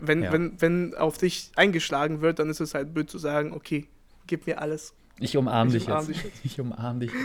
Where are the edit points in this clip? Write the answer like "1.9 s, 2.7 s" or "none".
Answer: none